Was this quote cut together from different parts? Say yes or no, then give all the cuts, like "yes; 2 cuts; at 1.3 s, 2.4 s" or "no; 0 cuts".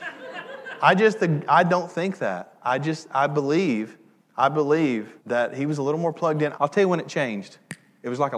yes; 2 cuts; at 5.2 s, 6.5 s